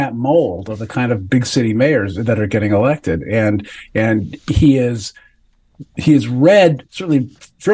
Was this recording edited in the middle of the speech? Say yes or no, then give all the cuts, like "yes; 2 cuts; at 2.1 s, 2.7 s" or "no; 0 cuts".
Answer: no; 0 cuts